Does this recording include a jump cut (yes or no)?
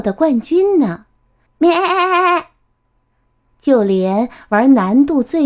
yes